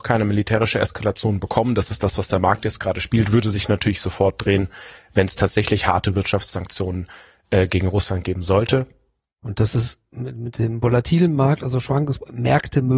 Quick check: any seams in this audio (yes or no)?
no